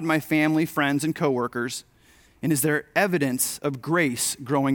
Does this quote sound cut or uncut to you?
uncut